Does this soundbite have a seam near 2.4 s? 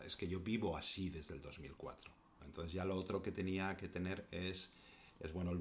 yes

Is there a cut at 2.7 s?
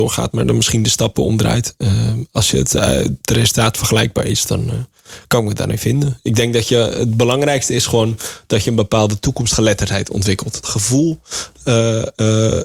no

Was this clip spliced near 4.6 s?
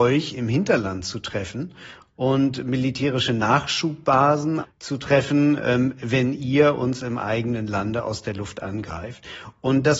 yes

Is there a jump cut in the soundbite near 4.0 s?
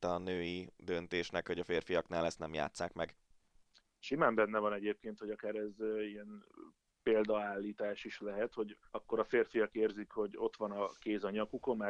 no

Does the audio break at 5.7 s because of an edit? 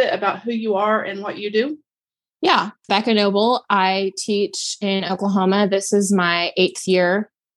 no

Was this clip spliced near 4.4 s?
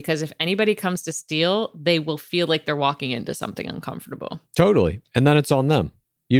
no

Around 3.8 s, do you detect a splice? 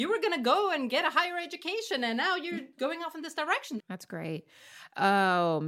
yes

